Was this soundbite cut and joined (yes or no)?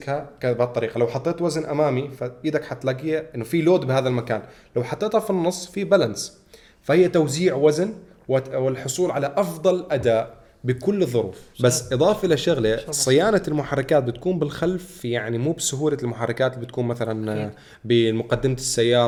no